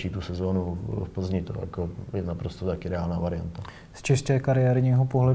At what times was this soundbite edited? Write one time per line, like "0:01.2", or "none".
none